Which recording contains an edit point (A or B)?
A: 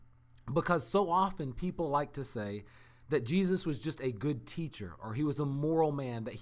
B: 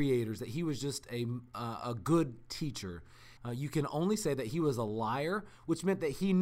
B